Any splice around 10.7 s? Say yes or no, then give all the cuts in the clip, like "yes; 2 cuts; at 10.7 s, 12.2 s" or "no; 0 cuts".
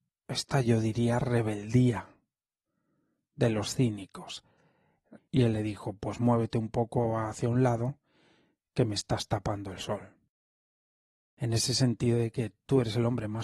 no; 1 cut; at 5.2 s